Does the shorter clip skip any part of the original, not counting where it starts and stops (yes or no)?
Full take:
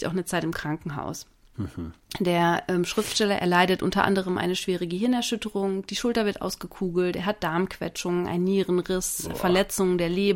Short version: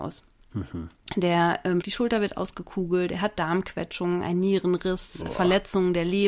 yes